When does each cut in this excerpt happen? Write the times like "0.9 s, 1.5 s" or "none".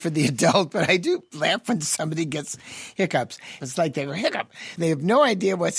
3.6 s, 4.8 s